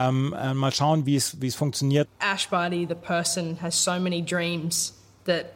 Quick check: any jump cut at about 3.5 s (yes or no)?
no